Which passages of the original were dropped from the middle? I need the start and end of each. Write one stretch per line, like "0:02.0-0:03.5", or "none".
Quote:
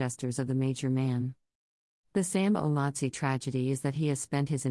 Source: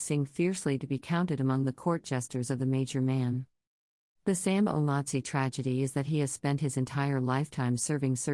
none